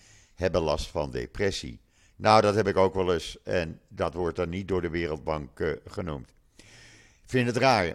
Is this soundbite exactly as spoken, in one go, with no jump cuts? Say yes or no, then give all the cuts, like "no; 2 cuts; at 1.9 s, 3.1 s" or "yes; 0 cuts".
yes; 0 cuts